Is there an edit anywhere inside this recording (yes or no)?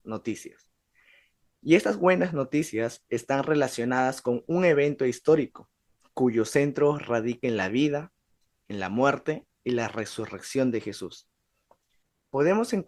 no